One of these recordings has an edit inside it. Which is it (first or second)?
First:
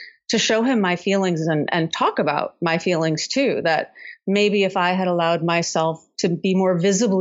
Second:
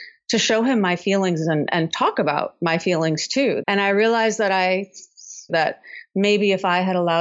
second